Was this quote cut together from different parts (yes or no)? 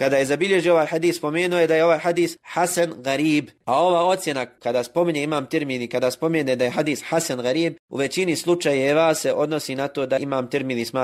no